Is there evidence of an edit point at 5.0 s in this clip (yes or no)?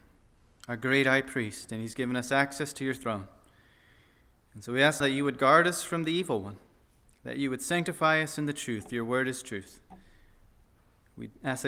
yes